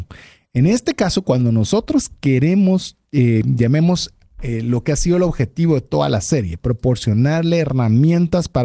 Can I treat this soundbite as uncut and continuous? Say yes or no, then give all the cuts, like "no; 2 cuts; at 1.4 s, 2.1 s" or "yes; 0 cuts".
yes; 0 cuts